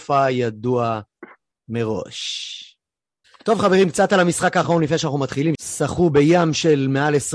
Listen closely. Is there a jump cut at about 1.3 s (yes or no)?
no